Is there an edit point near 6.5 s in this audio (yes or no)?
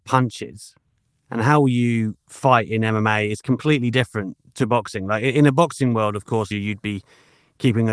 yes